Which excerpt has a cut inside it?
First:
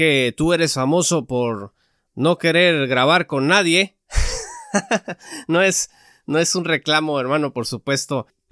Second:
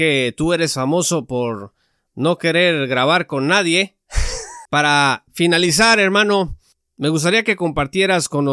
second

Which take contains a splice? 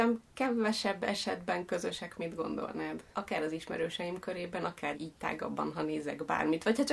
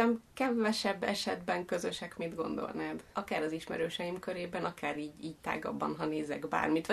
first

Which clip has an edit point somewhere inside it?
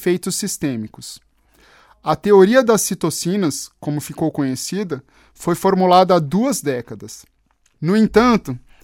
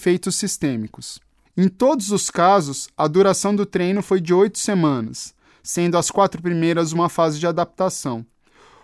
second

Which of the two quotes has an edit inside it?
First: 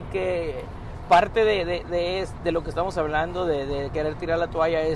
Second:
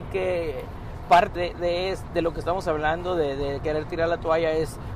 second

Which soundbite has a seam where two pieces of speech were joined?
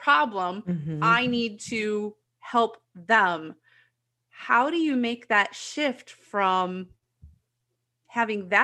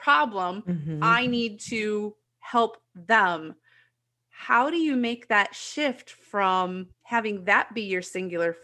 second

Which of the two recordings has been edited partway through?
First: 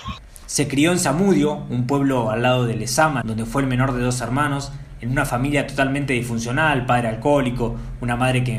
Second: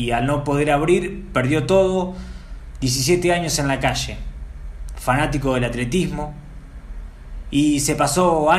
first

